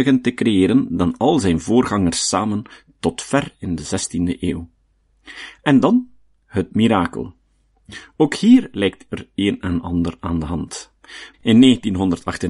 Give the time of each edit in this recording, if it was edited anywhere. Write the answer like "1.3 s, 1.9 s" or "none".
11.3 s